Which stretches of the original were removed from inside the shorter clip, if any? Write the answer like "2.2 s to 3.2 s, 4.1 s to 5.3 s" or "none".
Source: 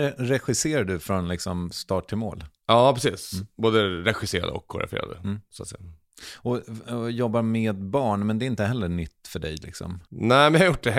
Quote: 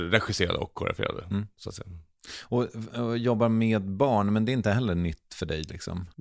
none